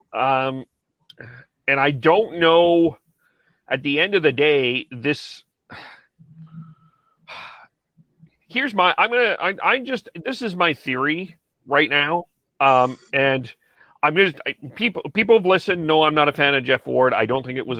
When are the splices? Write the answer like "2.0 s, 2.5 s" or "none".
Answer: none